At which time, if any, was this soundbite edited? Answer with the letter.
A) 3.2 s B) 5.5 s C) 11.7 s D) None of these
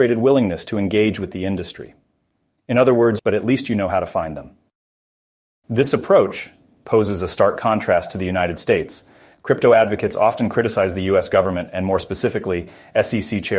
A